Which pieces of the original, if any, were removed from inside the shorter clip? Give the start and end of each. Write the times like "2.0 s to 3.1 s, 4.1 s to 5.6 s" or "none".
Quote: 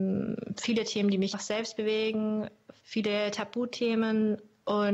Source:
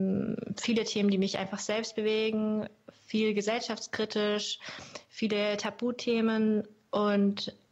1.3 s to 1.5 s, 3.0 s to 5.1 s